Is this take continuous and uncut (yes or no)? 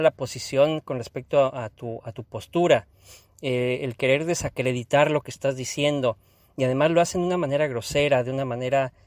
yes